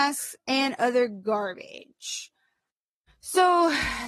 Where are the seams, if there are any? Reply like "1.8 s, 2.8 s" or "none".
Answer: 3.1 s